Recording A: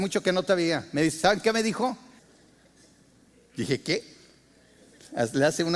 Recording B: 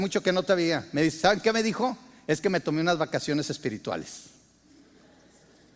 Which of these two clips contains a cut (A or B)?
A